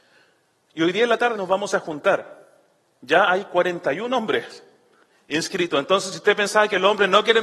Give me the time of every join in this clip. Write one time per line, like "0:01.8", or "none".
0:01.3